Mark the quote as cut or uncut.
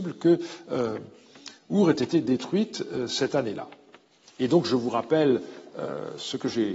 uncut